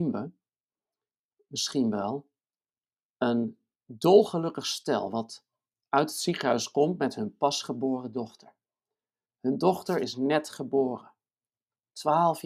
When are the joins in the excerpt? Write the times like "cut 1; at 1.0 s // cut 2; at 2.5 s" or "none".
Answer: none